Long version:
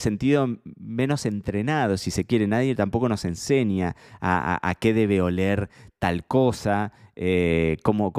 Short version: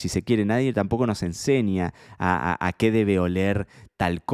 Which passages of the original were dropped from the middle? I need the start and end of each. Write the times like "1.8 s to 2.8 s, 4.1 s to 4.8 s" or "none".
none